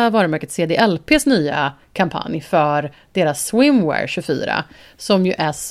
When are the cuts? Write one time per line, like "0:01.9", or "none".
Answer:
none